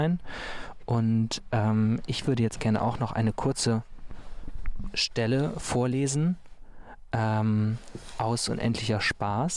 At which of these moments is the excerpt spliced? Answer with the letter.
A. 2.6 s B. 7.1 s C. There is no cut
A